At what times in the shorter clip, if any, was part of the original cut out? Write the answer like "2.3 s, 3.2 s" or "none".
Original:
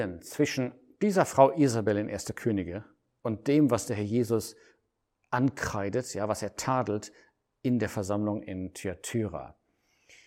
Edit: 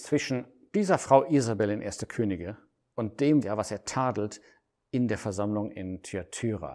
3.4 s